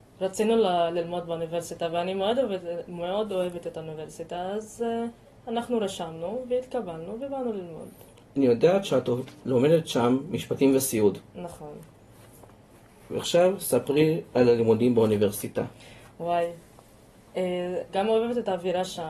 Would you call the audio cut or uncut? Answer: cut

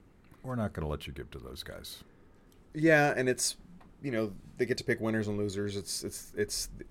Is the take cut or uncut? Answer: uncut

